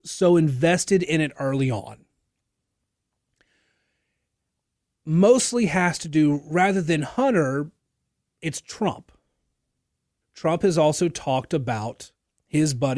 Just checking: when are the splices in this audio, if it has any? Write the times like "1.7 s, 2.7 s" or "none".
10.2 s